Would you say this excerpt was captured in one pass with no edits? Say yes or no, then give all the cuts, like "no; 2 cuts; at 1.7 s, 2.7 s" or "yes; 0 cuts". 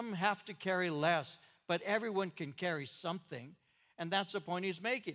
yes; 0 cuts